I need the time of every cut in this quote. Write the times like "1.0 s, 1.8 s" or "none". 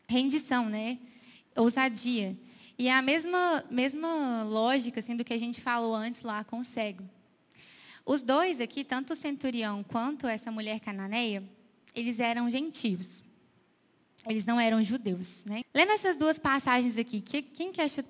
15.6 s